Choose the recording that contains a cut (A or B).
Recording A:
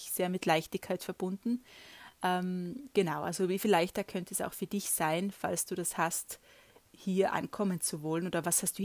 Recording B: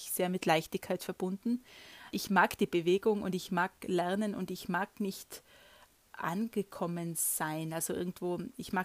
B